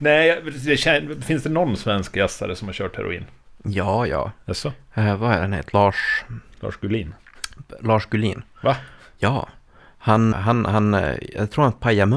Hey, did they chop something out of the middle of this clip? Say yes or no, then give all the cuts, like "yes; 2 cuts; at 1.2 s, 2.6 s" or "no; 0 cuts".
yes; 1 cut; at 10.3 s